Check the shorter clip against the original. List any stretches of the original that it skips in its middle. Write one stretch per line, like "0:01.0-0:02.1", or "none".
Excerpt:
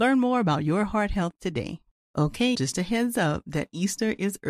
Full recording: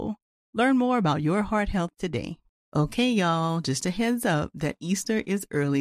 0:03.1-0:03.6

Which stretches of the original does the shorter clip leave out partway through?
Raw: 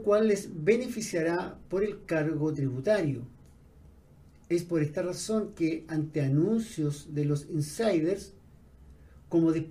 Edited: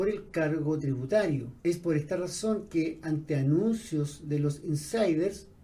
0:03.3-0:04.4

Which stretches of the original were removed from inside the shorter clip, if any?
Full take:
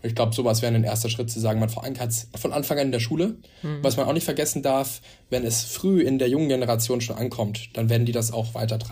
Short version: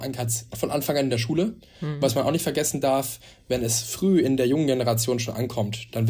none

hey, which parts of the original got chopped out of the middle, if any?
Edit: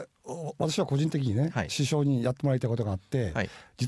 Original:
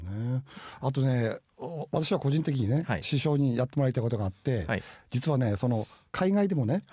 none

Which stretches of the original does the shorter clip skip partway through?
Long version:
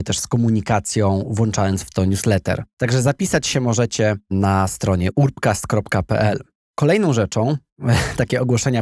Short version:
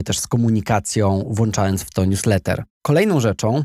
0:02.7-0:06.6

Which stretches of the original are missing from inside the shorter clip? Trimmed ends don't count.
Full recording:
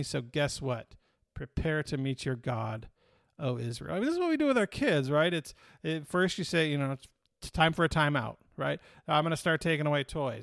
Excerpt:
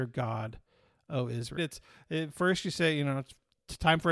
0:03.9-0:05.3

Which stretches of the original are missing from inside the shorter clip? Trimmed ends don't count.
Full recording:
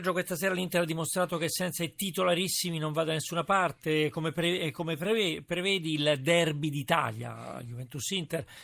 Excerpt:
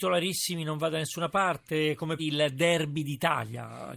0:04.3-0:05.9

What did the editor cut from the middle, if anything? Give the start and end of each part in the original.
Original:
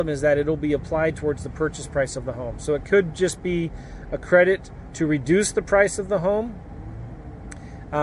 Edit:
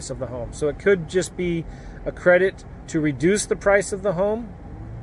none

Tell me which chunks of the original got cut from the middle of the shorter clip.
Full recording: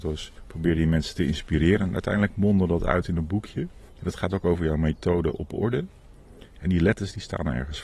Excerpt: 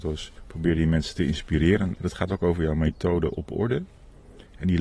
0:01.9-0:03.9

